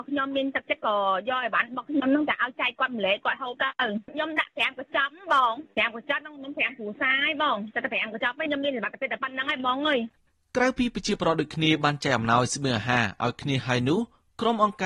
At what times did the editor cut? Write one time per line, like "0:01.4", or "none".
none